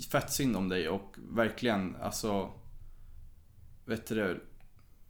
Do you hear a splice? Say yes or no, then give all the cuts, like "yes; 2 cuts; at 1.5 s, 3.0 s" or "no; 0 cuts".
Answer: no; 0 cuts